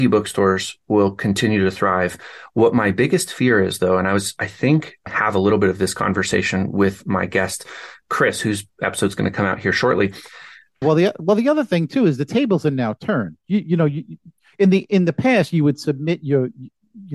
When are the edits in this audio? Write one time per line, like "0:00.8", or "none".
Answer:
0:05.1
0:10.8

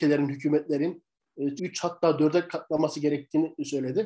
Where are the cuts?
0:01.6

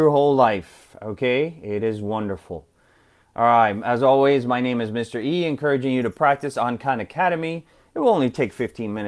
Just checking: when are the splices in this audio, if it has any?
none

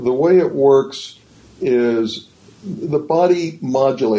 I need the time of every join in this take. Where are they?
none

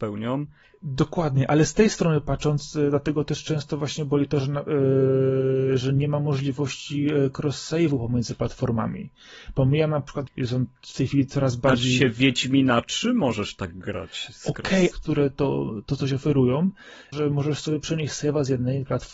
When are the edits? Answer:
0:10.3
0:14.9
0:17.1

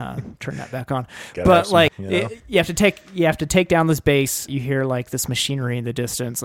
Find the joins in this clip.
0:01.9
0:04.5

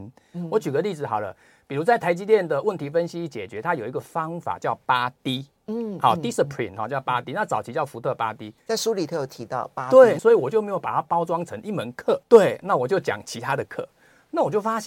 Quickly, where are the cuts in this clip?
0:08.6
0:10.2
0:12.2

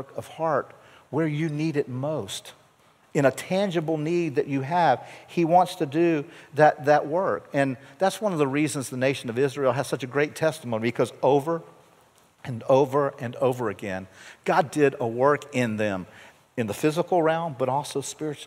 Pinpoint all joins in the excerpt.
none

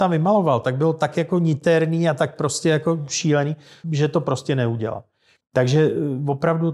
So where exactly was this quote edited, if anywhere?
0:03.8
0:05.4

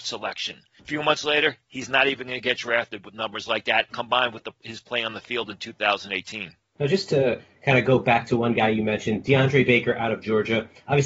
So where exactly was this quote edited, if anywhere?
0:03.9

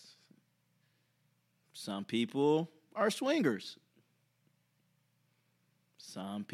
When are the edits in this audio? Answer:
none

